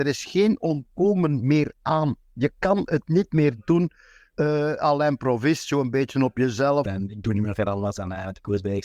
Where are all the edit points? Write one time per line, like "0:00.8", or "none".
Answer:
0:06.8